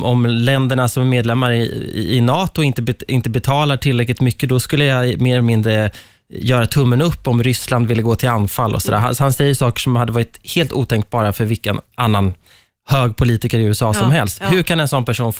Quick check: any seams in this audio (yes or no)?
no